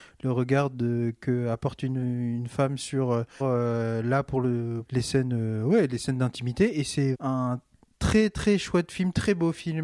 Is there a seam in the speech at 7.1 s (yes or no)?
yes